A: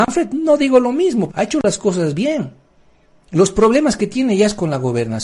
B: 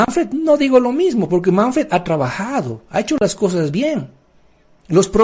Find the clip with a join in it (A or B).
A